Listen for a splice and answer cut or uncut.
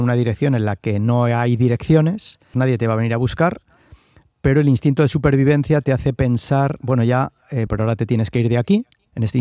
cut